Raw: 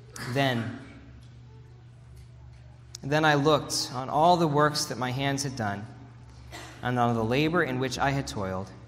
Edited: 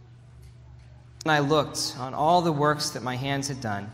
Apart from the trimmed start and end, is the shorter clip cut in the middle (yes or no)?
yes